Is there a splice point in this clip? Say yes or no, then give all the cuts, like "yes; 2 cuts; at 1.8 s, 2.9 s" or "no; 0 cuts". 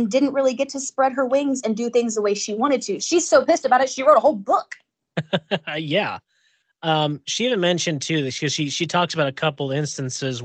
yes; 1 cut; at 3.0 s